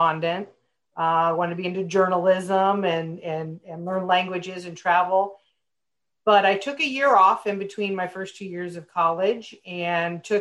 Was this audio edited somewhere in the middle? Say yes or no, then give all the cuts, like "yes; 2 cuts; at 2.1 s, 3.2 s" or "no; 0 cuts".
no; 0 cuts